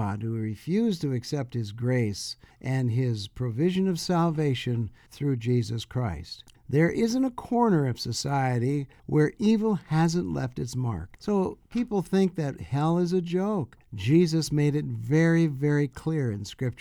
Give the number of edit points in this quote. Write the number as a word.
two